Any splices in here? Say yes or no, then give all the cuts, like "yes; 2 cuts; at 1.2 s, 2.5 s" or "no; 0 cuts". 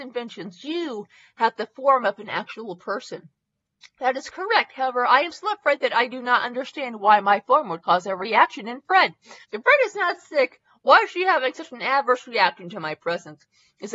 yes; 1 cut; at 9.4 s